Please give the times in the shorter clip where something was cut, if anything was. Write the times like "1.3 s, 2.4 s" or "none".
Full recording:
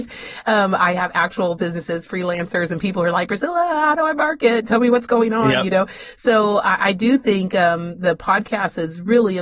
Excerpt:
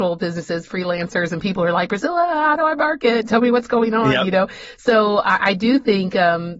none